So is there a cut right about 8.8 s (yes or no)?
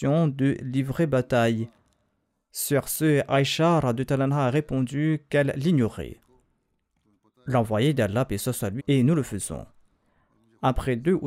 yes